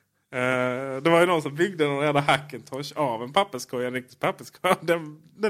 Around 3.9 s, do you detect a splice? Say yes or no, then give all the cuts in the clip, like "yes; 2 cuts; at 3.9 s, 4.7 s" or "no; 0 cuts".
no; 0 cuts